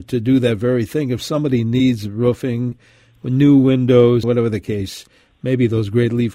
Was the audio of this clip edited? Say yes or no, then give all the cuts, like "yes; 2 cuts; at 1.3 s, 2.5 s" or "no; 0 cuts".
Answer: yes; 1 cut; at 4.2 s